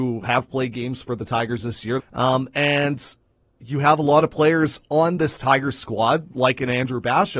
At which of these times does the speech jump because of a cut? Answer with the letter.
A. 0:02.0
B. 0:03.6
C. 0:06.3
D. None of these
A